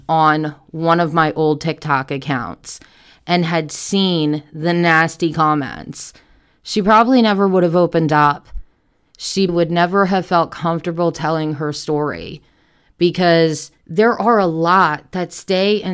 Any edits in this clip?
yes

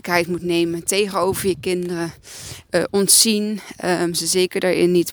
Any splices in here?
yes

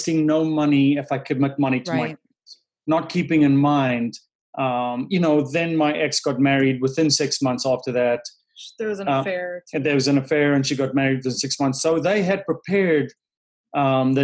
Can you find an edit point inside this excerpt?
no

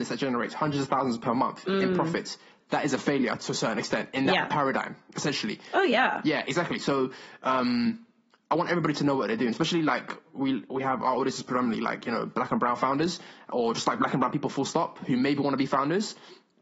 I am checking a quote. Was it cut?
no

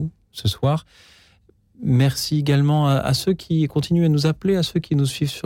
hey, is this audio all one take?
yes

